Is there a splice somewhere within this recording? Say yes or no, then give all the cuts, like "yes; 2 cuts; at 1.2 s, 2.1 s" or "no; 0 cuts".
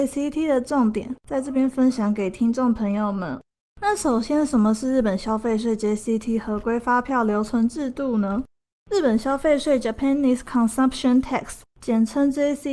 no; 0 cuts